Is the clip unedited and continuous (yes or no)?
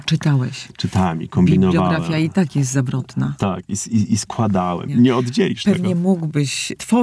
no